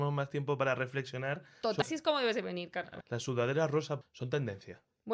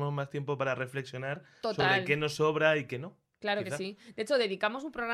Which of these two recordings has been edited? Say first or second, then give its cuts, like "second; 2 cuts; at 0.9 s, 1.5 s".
first; 3 cuts; at 1.8 s, 3.0 s, 4.0 s